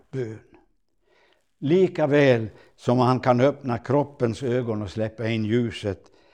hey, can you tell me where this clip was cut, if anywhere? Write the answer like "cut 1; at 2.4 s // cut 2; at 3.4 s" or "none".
none

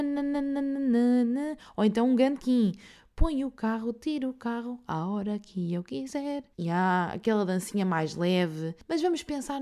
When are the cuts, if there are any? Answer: cut 1; at 6.5 s

